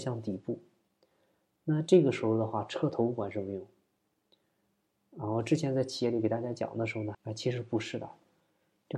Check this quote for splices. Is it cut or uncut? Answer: cut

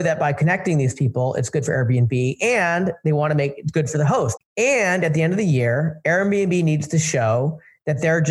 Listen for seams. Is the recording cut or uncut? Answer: cut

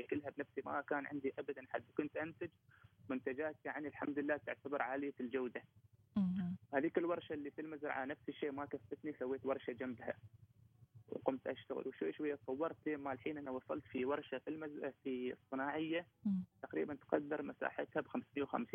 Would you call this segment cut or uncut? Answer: uncut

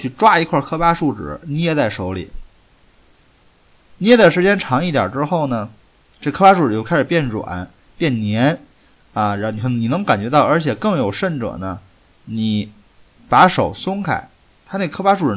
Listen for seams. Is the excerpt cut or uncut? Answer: uncut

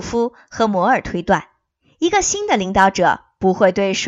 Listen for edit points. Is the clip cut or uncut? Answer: uncut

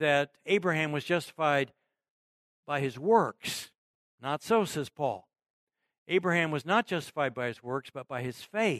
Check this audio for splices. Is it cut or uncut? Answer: uncut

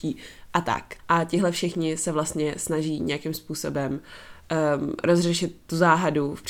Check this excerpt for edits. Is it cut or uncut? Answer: cut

